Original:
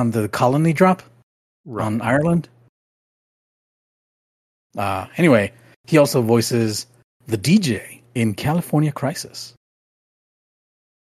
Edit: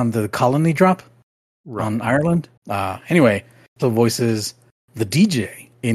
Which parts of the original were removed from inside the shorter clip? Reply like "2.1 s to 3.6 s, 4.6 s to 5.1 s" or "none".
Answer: 2.6 s to 4.6 s, 5.9 s to 6.1 s